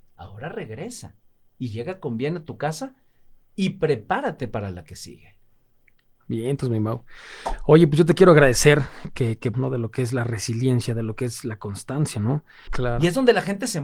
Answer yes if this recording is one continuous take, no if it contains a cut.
no